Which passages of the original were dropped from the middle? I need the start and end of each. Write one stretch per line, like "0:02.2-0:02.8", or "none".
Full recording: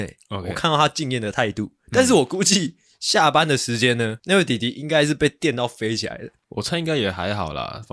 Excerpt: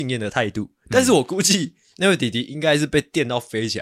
0:02.9-0:04.2